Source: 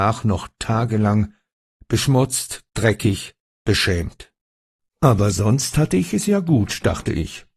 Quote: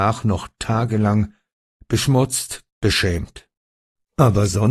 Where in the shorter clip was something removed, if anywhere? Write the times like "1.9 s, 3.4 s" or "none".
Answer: 2.7 s